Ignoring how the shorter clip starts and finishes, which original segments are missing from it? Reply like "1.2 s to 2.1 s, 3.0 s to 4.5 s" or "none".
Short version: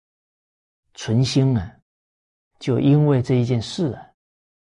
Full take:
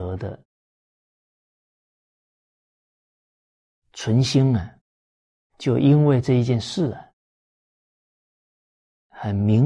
none